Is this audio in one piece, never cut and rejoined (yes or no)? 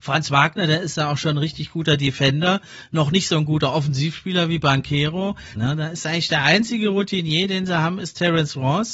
no